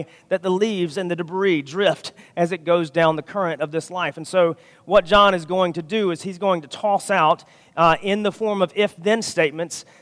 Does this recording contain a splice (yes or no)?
no